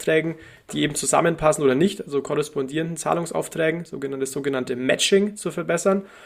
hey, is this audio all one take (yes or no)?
yes